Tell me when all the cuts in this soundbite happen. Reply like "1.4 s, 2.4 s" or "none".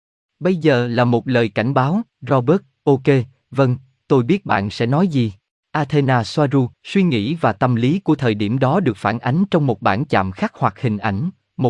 2.1 s, 5.6 s, 6.7 s

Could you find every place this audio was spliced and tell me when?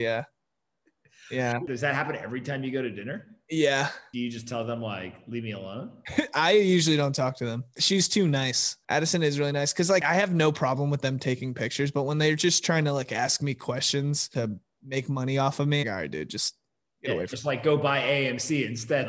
15.8 s

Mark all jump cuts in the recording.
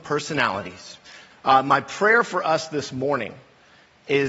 1.3 s

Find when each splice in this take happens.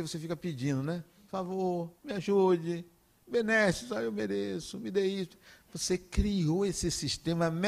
2.0 s

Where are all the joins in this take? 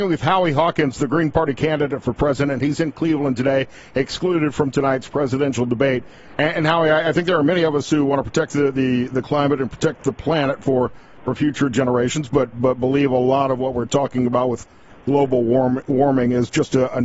none

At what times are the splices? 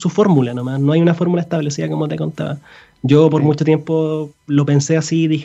none

